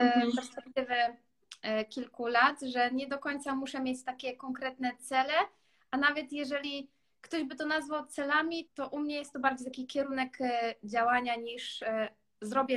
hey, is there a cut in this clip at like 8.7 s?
yes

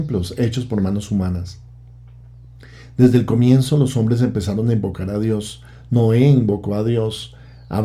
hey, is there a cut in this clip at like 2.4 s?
no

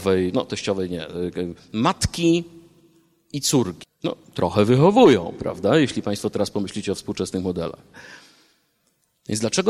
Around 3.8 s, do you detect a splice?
yes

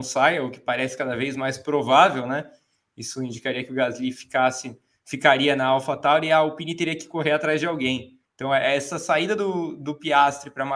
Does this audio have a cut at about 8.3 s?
yes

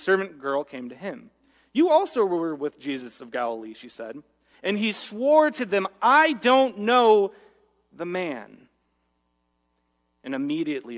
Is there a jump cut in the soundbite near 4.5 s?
yes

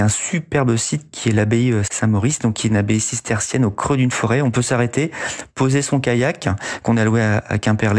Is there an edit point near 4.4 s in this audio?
no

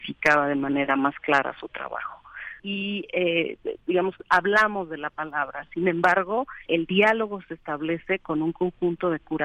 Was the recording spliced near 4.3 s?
no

